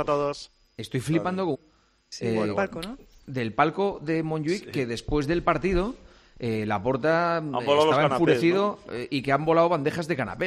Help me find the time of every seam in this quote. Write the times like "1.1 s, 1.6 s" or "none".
1.5 s